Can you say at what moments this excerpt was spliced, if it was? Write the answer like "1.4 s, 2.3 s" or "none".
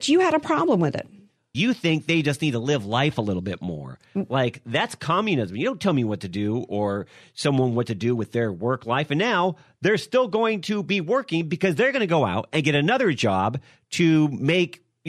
1.5 s